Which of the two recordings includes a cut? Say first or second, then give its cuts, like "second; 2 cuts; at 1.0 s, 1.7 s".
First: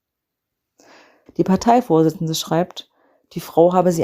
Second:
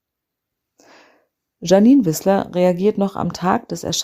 first; 1 cut; at 1.3 s